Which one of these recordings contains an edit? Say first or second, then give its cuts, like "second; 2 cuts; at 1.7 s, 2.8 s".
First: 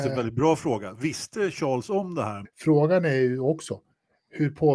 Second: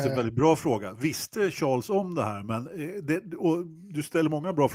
first; 1 cut; at 2.4 s